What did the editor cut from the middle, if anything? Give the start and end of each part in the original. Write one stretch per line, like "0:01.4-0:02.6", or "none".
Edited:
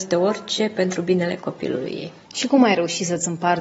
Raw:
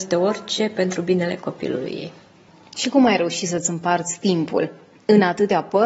0:02.3-0:02.7